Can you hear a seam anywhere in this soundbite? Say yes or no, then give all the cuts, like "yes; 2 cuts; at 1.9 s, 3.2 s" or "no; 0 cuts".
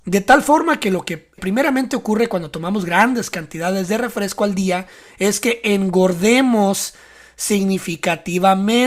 yes; 1 cut; at 1.4 s